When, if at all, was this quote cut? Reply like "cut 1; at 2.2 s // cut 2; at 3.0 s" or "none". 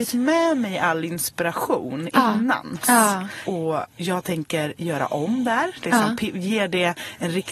cut 1; at 2.8 s